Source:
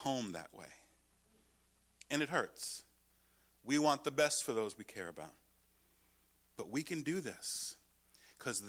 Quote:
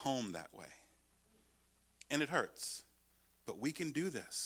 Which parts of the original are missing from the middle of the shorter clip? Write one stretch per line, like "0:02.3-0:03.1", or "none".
0:03.3-0:06.4